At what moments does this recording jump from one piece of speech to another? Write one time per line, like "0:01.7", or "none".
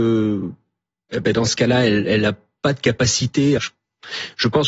0:03.6